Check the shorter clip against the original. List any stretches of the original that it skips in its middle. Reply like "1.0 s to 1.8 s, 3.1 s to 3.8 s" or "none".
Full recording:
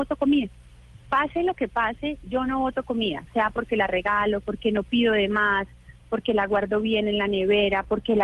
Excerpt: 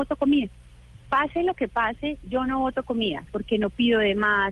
3.3 s to 4.4 s